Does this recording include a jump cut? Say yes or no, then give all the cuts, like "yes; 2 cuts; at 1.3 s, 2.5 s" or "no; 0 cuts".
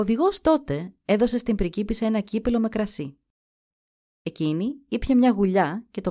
no; 0 cuts